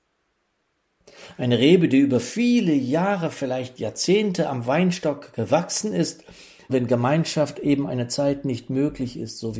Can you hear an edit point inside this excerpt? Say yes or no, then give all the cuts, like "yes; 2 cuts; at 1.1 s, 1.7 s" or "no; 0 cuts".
yes; 1 cut; at 6.7 s